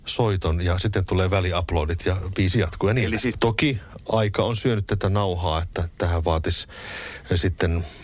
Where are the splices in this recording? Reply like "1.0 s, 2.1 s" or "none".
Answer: 3.3 s